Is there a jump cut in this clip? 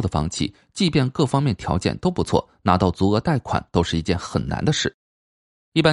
no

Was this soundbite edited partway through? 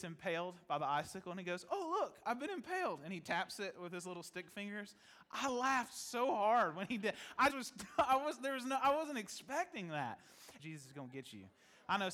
yes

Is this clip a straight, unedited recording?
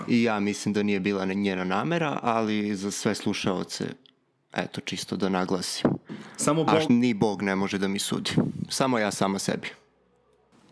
no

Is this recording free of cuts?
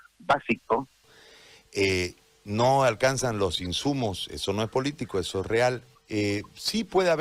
no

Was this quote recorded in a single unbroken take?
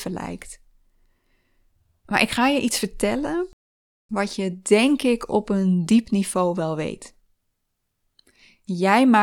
yes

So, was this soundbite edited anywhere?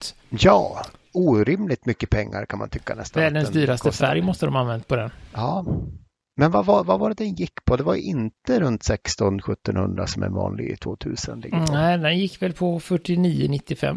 no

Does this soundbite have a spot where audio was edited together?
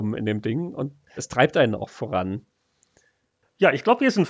yes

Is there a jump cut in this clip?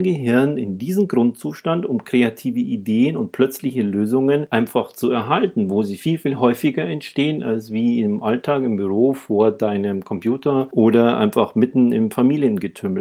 no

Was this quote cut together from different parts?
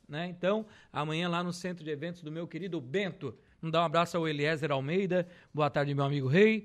yes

